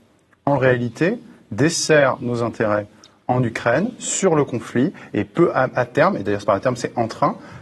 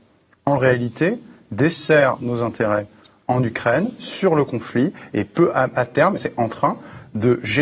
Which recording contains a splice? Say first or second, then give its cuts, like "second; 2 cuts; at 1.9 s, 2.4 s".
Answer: second; 1 cut; at 6.2 s